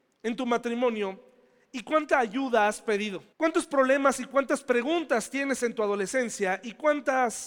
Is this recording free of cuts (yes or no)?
no